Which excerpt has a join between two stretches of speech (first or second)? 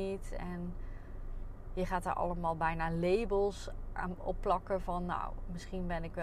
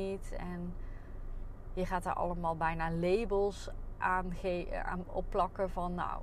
first